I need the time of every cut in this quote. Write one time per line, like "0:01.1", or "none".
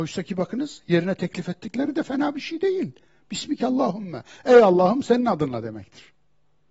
none